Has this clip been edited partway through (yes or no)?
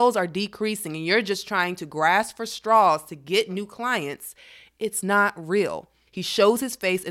yes